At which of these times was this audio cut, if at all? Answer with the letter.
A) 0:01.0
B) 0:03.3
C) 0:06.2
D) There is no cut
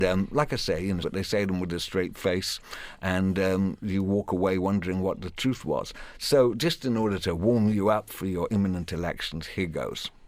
A